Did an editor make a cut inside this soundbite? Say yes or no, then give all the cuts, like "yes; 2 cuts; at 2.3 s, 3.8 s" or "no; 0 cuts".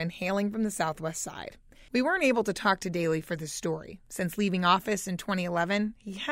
yes; 1 cut; at 1.9 s